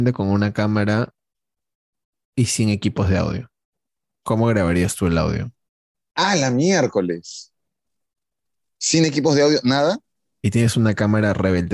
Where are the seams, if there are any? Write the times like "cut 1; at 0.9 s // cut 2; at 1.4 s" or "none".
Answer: none